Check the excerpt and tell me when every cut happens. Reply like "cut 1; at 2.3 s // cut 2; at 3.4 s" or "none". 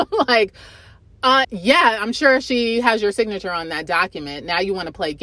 cut 1; at 1.4 s